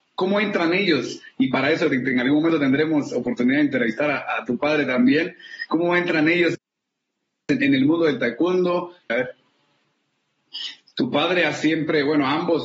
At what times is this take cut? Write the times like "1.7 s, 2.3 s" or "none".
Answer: 9.1 s, 10.9 s